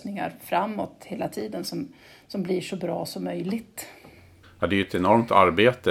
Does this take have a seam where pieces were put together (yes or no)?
yes